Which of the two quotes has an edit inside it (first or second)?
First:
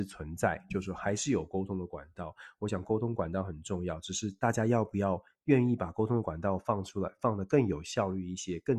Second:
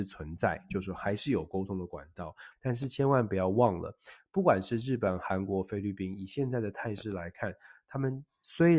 second